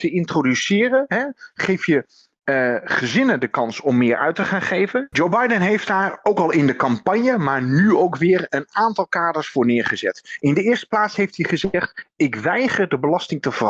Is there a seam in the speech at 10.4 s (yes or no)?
no